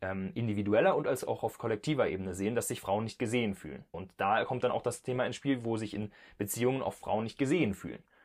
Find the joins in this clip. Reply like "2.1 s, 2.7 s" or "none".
3.9 s